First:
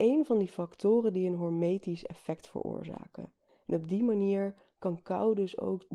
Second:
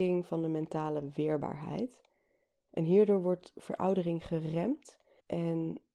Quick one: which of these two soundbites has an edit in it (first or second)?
second